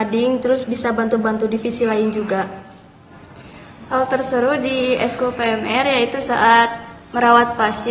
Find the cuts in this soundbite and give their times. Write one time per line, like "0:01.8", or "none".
none